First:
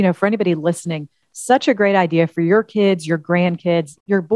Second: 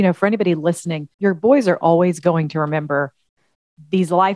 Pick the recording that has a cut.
second; 1 cut; at 1.1 s

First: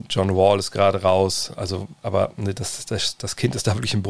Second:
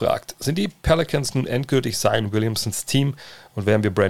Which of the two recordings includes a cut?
first; 1 cut; at 1.5 s

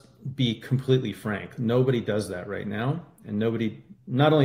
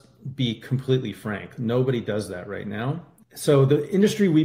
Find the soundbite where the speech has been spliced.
second; 1 cut; at 3.2 s

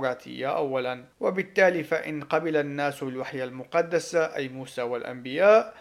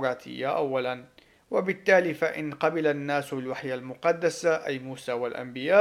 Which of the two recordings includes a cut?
first; 1 cut; at 1.1 s

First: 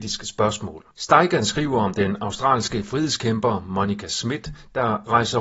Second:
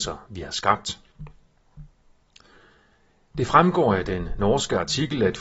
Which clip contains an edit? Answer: first; 1 cut; at 0.9 s

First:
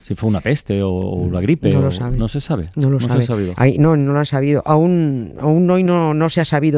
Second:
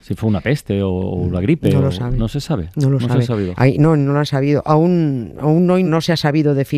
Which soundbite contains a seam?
second; 1 cut; at 5.8 s

